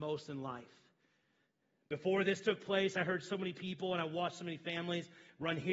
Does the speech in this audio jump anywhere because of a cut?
no; 0 cuts

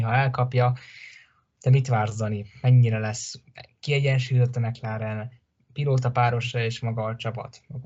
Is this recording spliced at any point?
no; 0 cuts

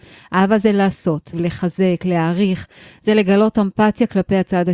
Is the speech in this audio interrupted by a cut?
yes; 1 cut; at 1.3 s

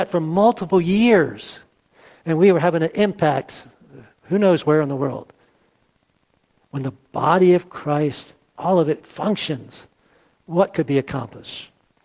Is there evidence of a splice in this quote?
no; 0 cuts

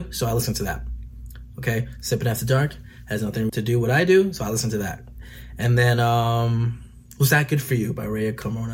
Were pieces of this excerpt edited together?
yes; 1 cut; at 3.5 s

